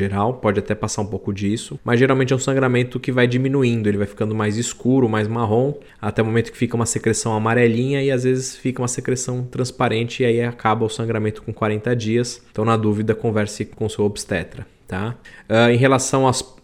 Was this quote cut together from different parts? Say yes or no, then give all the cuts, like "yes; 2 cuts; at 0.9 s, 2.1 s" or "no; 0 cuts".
yes; 1 cut; at 12.5 s